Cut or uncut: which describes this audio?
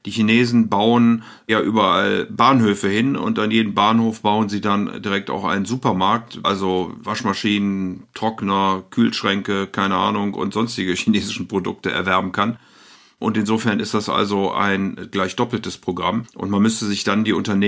cut